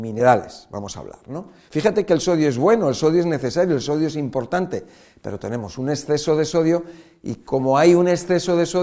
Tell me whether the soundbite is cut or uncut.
cut